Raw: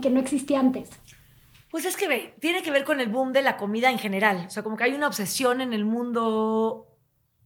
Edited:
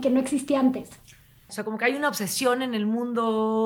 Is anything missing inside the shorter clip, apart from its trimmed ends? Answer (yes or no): yes